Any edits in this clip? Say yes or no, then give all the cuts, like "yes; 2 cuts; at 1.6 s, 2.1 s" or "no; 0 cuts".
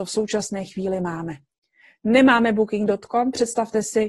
no; 0 cuts